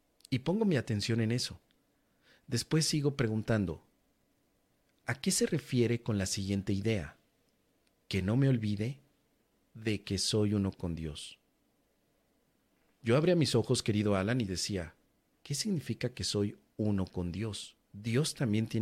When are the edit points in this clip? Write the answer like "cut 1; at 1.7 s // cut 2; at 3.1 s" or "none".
none